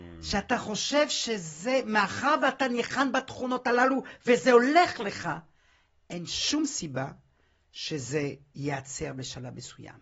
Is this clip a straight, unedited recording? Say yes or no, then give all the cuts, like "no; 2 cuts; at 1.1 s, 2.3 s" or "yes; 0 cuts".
yes; 0 cuts